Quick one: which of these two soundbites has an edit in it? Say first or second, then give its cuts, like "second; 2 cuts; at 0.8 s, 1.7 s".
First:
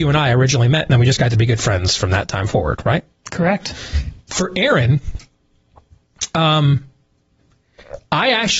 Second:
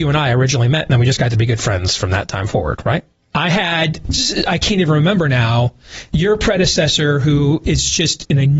second; 2 cuts; at 3.2 s, 6.1 s